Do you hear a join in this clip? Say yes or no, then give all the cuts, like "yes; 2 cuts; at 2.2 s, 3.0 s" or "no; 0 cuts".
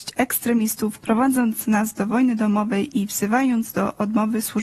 yes; 1 cut; at 1.0 s